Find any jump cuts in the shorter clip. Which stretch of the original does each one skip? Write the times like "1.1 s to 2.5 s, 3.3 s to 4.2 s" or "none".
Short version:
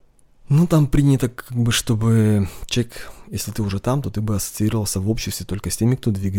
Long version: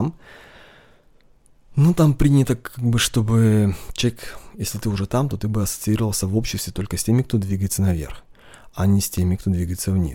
none